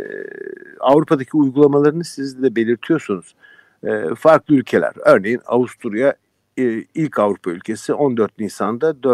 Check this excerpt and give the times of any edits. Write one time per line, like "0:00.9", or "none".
none